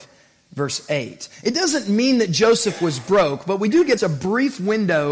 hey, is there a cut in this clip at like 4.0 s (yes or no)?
yes